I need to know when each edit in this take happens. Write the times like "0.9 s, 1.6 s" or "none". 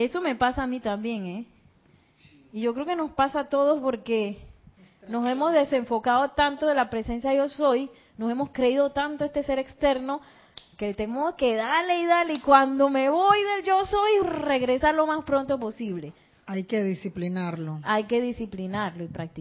14.2 s